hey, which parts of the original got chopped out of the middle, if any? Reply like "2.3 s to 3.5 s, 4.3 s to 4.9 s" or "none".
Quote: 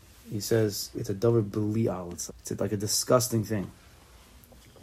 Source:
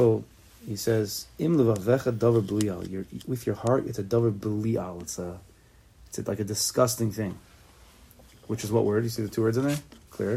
1.3 s to 3.8 s, 5.2 s to 5.9 s